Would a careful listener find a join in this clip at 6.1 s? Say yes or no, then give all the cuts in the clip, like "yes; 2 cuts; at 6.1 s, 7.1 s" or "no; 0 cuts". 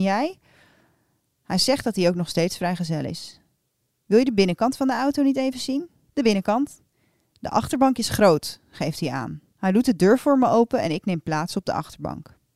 yes; 2 cuts; at 6.1 s, 9.5 s